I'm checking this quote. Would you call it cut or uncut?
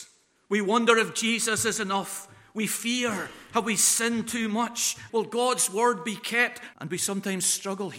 cut